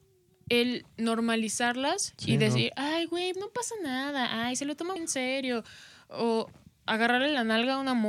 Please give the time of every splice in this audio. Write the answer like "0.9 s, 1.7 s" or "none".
3.3 s, 5.0 s